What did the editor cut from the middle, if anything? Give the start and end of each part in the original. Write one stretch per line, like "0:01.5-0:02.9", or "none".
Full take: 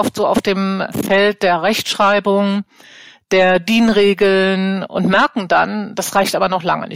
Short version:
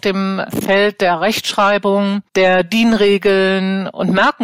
0:02.7-0:03.2